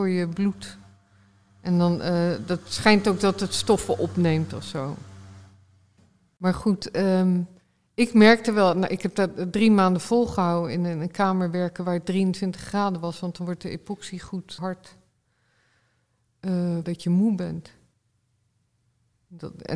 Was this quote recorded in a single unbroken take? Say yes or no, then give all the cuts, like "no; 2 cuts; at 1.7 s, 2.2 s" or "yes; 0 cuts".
no; 2 cuts; at 14.6 s, 16.8 s